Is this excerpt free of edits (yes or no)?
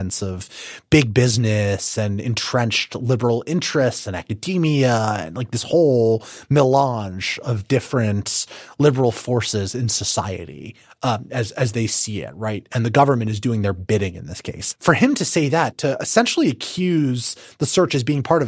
yes